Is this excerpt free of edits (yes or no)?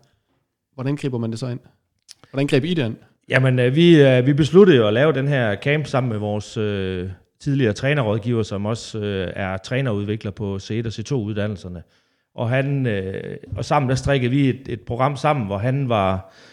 yes